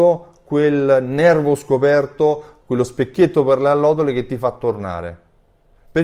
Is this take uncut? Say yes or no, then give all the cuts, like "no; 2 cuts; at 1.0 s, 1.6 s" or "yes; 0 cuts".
no; 1 cut; at 2.6 s